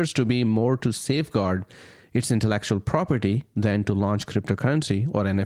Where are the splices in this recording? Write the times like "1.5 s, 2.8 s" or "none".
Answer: none